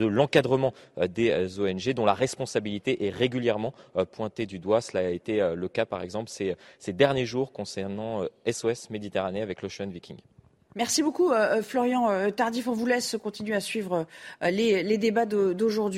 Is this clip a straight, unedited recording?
yes; 0 cuts

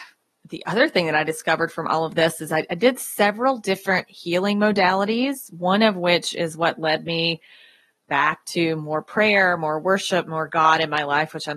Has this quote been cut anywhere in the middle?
no; 0 cuts

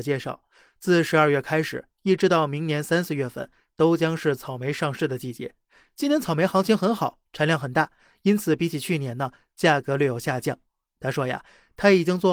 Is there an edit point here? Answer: no; 0 cuts

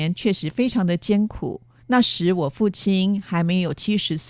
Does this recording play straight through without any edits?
no; 1 cut; at 1.8 s

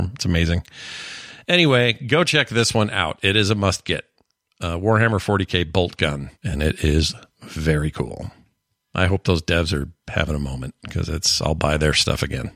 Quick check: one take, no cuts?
no; 1 cut; at 6.3 s

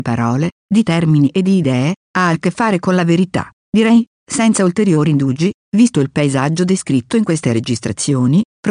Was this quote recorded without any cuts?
no; 1 cut; at 3.6 s

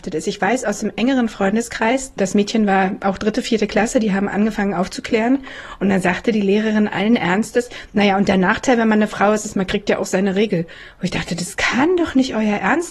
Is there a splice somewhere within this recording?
yes; 1 cut; at 2.2 s

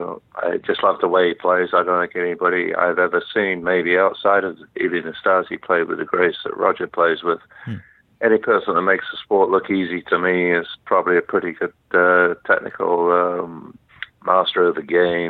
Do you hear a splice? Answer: no; 0 cuts

